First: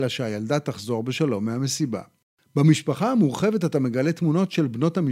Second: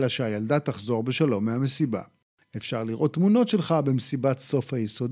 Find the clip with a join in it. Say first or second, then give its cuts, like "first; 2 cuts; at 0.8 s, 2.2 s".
second; 1 cut; at 2.4 s